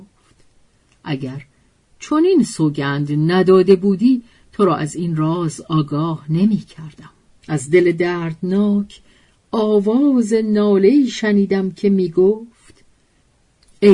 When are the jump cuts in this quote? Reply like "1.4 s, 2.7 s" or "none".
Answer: 7.4 s